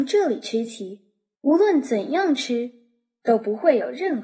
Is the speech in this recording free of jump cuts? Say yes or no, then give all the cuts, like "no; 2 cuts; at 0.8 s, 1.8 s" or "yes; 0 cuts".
no; 1 cut; at 1.4 s